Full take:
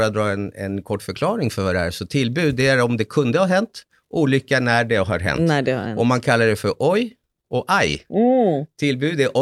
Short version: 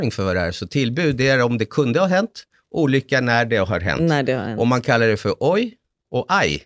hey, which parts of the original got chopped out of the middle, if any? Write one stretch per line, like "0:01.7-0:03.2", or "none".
none